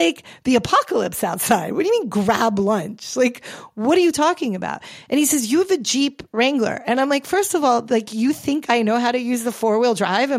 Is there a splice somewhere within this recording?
no; 0 cuts

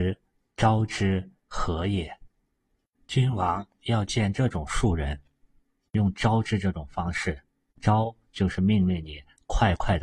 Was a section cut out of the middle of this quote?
yes; 1 cut; at 1.4 s

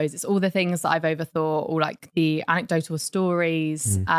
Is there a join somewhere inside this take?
no; 0 cuts

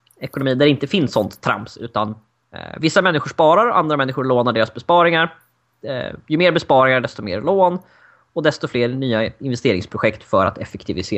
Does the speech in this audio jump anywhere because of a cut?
no; 0 cuts

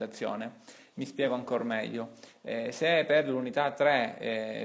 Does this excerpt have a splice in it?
yes; 1 cut; at 0.9 s

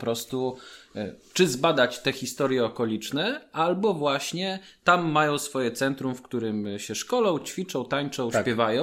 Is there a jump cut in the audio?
no; 0 cuts

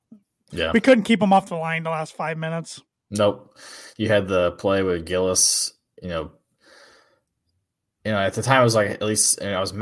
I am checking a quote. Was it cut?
no; 0 cuts

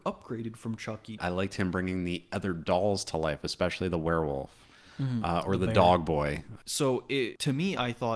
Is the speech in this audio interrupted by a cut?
yes; 2 cuts; at 1.2 s, 6.6 s

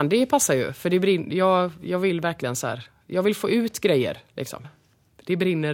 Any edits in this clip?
yes; 1 cut; at 4.6 s

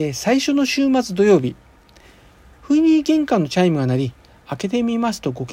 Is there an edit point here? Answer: no; 0 cuts

